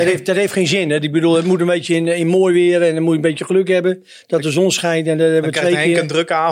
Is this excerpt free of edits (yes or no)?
yes